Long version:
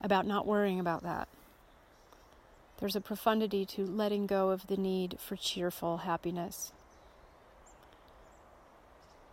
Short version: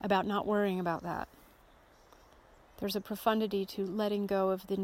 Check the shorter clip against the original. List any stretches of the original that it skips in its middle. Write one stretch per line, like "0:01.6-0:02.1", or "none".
none

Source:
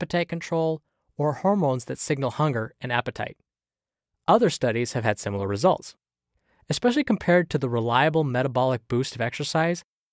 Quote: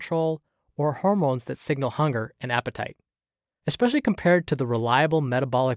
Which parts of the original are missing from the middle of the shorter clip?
0:04.0-0:06.6

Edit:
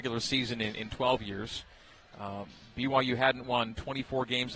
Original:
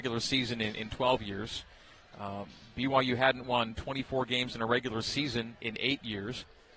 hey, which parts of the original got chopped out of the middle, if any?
none

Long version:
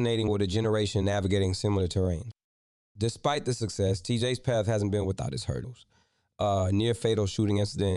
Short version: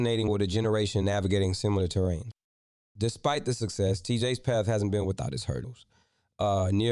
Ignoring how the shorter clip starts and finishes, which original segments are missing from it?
none

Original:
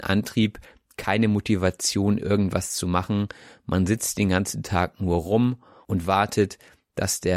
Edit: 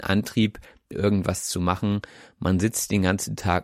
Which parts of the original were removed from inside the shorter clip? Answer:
0:00.9-0:02.2

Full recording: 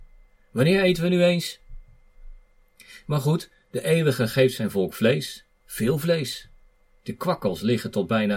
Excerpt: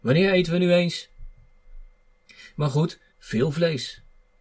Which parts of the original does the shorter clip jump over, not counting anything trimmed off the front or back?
0:03.6-0:05.6

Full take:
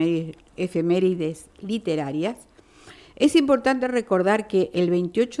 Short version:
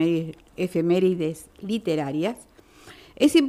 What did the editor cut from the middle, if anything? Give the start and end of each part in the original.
none

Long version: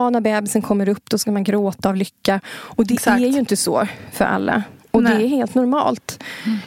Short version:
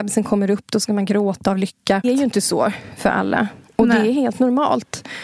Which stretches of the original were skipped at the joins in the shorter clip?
0:02.4-0:03.2

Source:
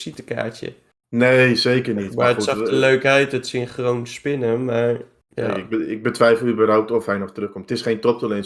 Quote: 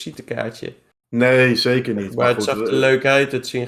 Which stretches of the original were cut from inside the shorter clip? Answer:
none

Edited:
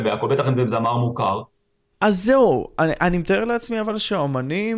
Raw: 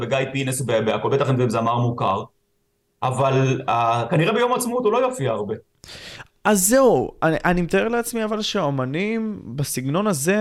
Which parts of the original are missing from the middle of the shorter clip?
0:02.7-0:06.4

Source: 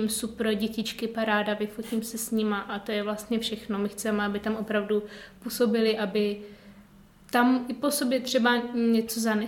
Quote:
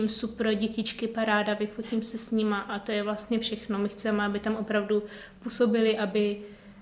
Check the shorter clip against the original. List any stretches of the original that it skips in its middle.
none

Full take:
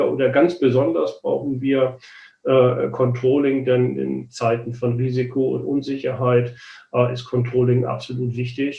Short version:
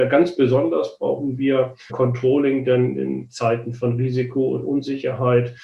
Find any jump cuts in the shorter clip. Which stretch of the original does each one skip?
0:02.1-0:02.9

